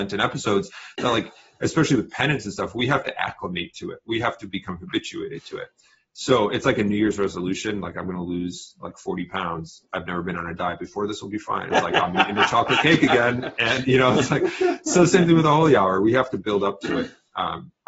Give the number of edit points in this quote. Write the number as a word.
one